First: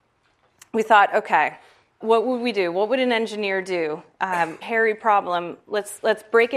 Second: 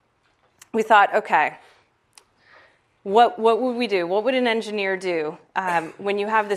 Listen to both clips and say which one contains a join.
first; 2 cuts; at 2.0 s, 4.6 s

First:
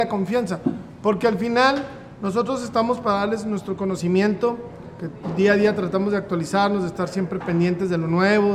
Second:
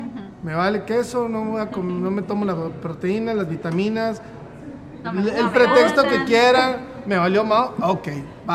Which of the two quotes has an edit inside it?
second; 1 cut; at 5.0 s

